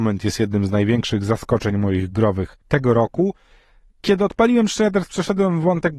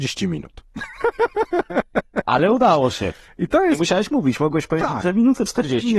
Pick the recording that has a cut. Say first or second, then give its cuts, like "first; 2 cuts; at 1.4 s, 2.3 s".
first; 1 cut; at 2.6 s